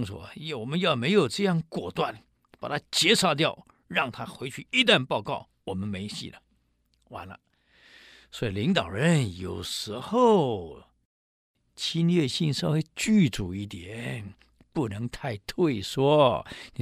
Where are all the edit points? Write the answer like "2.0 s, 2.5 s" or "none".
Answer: none